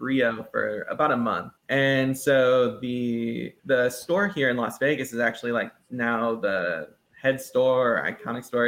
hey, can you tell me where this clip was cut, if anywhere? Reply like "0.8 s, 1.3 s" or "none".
1.6 s, 3.6 s